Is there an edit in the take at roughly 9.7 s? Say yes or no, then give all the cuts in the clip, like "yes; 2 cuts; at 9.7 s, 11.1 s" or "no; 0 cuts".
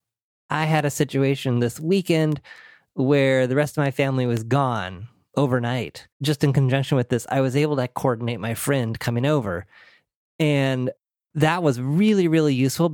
no; 1 cut; at 6.1 s